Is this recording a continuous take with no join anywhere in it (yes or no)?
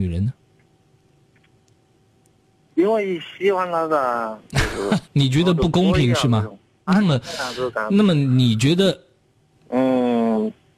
no